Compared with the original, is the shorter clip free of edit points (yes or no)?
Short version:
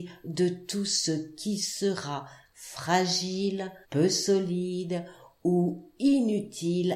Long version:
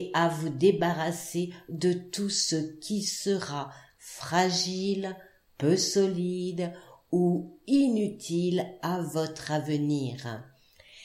no